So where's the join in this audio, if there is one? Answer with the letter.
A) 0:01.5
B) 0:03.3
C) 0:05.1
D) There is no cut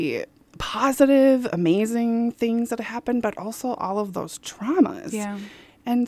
D